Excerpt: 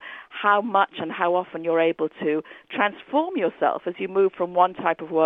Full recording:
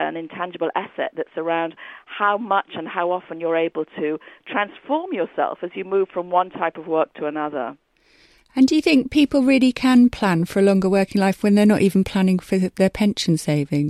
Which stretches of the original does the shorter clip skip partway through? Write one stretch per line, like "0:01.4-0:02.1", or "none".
none